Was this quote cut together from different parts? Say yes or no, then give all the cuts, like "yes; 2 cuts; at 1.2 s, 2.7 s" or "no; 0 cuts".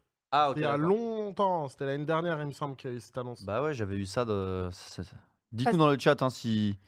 no; 0 cuts